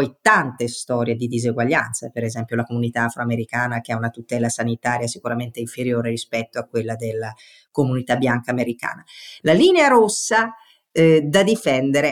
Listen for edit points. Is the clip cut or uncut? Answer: cut